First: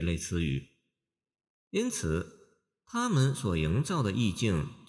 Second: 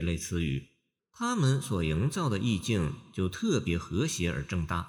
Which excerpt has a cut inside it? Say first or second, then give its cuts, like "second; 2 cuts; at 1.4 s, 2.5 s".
second; 1 cut; at 1.0 s